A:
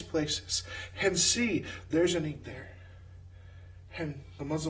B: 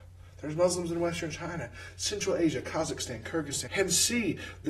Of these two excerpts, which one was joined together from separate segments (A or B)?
B